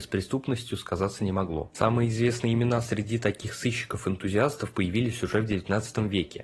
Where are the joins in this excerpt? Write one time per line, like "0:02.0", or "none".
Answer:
none